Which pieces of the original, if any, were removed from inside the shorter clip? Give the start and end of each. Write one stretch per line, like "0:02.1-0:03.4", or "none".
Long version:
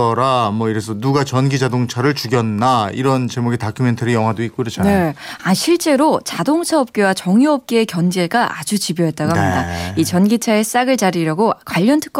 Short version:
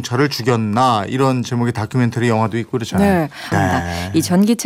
0:05.4-0:09.3